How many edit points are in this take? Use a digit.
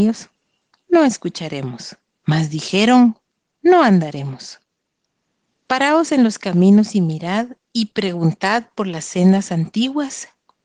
2